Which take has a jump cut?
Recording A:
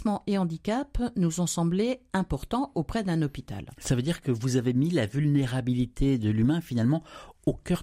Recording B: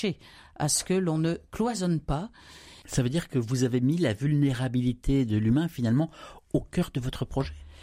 B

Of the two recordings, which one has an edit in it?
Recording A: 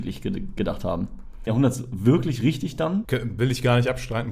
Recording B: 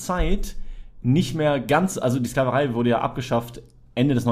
A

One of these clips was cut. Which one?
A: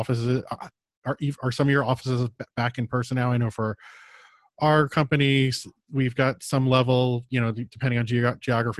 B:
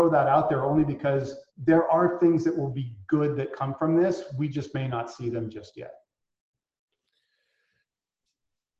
B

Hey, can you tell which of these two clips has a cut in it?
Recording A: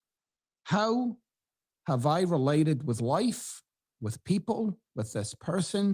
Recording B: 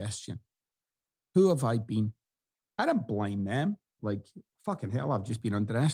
B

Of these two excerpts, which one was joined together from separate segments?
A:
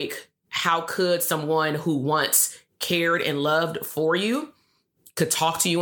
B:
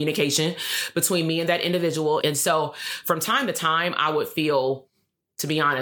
B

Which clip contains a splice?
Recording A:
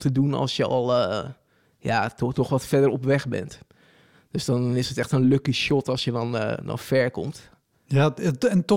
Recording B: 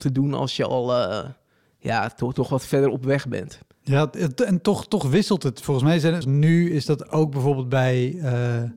B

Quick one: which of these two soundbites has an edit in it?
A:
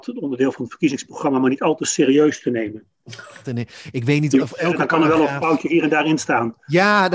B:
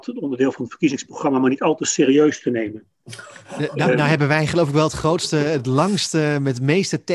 A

